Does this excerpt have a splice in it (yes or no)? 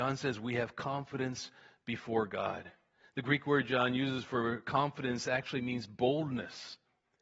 no